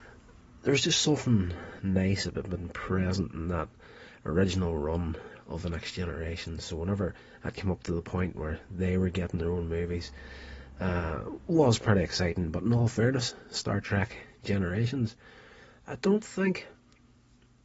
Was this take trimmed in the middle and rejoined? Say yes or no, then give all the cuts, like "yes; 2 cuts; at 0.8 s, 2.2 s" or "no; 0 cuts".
no; 0 cuts